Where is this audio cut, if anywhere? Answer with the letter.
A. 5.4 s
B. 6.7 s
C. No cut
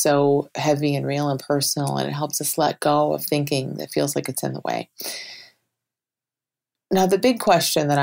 C